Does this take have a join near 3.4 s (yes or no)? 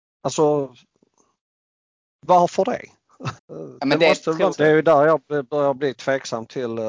yes